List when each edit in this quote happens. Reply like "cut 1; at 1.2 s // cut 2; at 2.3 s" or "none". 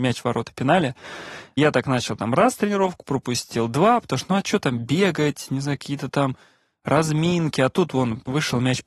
none